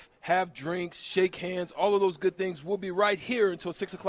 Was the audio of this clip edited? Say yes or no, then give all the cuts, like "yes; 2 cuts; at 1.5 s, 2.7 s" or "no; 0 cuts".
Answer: no; 0 cuts